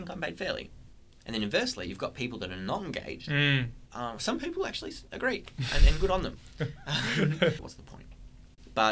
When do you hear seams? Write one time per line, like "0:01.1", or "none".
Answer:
0:03.9
0:07.6